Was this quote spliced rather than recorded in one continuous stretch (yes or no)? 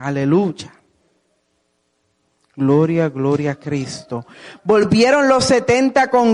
no